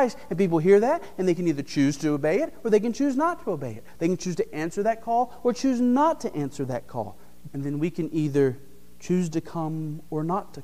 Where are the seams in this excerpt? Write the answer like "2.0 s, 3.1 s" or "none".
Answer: 7.5 s